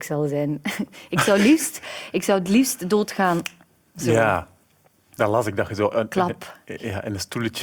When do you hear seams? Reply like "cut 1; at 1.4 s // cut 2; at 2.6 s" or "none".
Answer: none